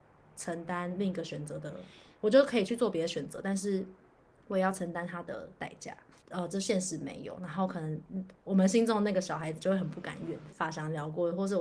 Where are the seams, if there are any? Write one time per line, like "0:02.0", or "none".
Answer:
0:06.2
0:10.5